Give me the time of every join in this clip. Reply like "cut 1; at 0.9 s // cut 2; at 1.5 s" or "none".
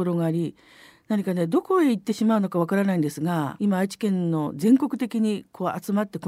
cut 1; at 3.6 s